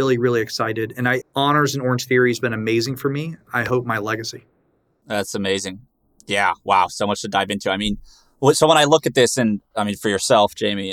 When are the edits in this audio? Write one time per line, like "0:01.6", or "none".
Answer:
0:01.2
0:03.5